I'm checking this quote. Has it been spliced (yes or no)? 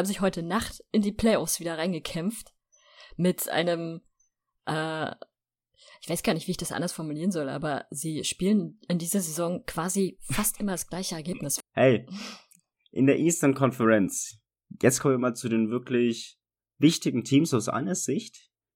yes